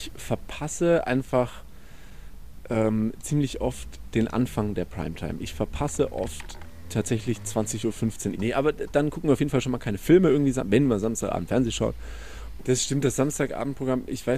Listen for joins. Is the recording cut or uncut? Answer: cut